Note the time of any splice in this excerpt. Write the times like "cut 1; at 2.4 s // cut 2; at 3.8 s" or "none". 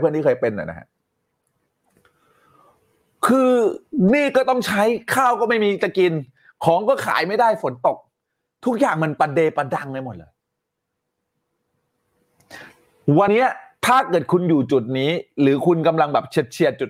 cut 1; at 13.3 s